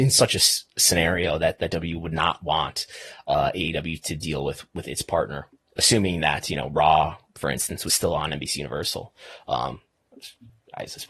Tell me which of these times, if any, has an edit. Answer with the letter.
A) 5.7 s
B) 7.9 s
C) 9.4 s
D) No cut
D